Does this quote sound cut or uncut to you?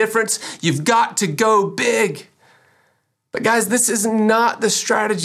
uncut